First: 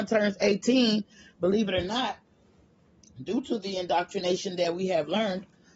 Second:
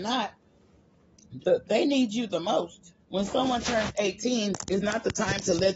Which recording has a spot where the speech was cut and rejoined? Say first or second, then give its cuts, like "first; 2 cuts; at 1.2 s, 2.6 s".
second; 2 cuts; at 1.4 s, 3.0 s